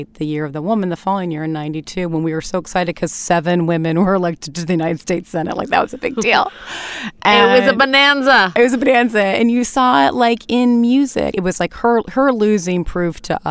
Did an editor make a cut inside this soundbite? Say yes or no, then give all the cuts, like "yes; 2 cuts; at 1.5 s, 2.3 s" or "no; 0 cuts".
yes; 1 cut; at 11.3 s